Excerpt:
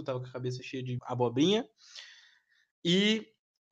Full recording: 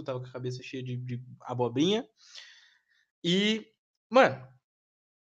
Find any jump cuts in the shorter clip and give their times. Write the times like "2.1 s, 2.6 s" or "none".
1.0 s